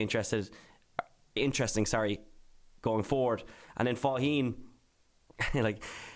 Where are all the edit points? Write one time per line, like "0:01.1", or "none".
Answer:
0:01.4